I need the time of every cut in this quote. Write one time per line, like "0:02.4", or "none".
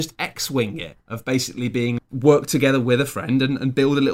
0:02.0